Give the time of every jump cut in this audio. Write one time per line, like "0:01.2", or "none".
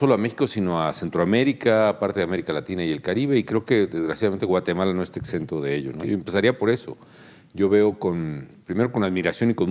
none